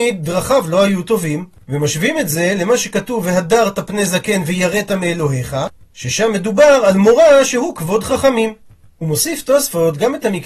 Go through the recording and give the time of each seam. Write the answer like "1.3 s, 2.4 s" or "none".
1.6 s